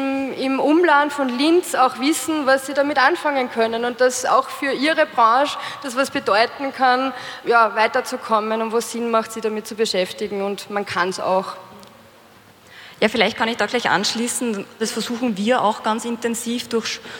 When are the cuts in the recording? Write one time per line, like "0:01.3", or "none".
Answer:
0:07.4
0:14.8